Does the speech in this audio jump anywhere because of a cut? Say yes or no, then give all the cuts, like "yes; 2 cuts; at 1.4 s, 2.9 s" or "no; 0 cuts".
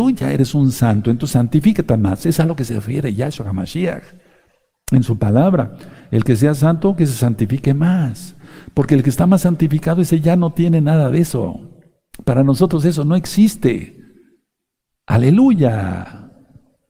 no; 0 cuts